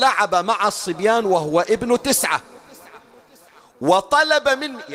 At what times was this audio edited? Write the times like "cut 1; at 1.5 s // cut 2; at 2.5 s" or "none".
none